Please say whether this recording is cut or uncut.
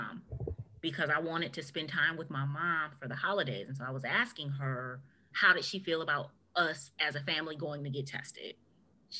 cut